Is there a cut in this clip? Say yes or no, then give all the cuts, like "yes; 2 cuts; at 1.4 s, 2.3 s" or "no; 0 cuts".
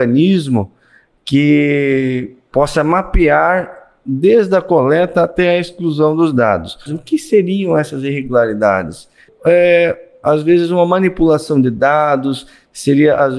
yes; 2 cuts; at 6.9 s, 9.3 s